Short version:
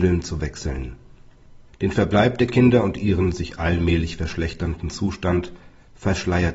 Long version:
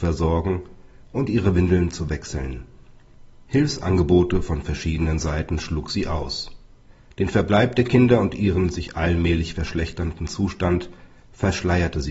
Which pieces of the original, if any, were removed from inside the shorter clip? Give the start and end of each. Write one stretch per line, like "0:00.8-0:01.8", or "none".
0:03.4-0:07.0